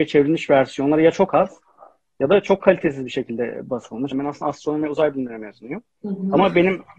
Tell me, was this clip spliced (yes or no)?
yes